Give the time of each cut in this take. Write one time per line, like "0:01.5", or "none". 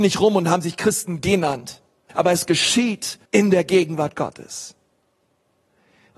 0:02.1
0:03.2